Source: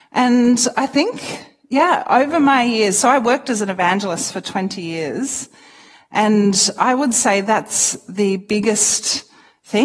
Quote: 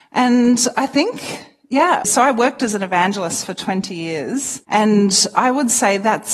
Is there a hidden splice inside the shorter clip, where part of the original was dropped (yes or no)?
yes